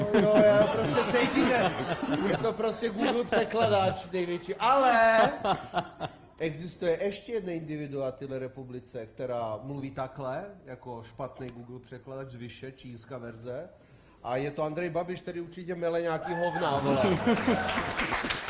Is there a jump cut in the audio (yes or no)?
no